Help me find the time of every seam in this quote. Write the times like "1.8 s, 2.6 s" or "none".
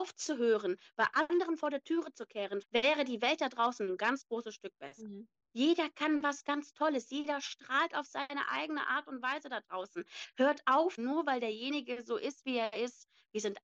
2.6 s, 5.5 s, 11.0 s